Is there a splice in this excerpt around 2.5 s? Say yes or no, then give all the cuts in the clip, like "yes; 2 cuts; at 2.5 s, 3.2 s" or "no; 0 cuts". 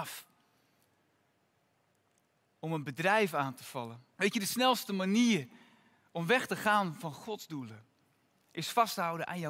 no; 1 cut; at 4.2 s